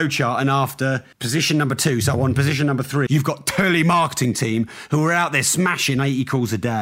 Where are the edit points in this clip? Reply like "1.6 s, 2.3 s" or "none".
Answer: 1.1 s, 3.1 s

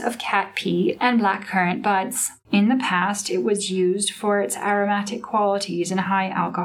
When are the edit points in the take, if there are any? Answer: 2.4 s

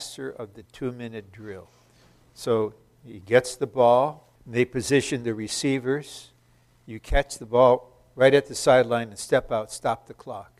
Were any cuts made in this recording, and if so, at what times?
4.4 s

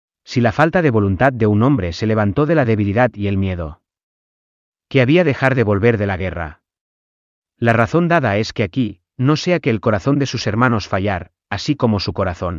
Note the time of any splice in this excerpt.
none

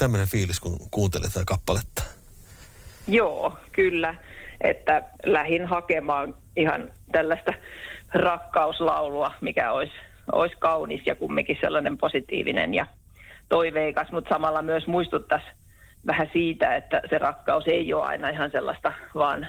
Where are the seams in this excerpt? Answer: 5.2 s

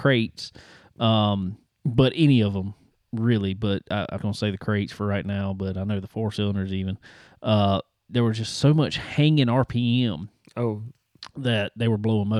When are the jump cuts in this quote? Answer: 4.2 s

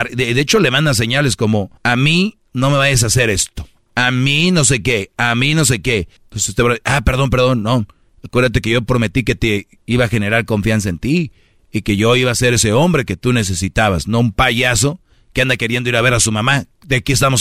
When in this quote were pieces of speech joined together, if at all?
1.8 s, 6.2 s

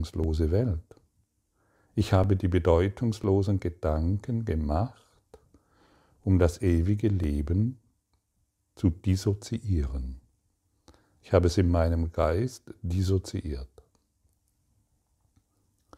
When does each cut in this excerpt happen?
none

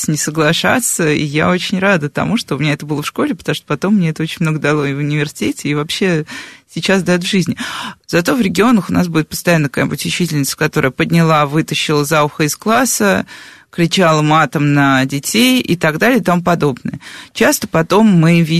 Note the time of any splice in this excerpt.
8.0 s

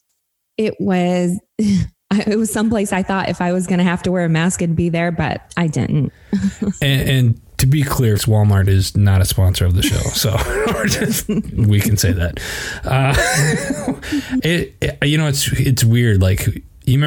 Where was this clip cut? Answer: 1.5 s, 8.2 s

